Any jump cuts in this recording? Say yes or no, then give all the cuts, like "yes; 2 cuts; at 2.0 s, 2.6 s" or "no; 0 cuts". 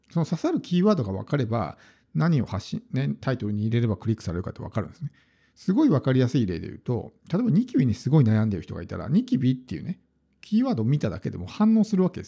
no; 0 cuts